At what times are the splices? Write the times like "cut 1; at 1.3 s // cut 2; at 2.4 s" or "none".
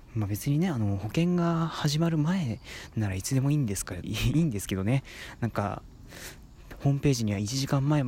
cut 1; at 4.0 s